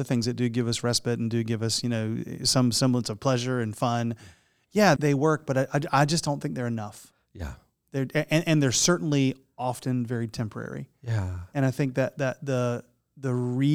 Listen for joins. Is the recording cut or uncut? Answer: cut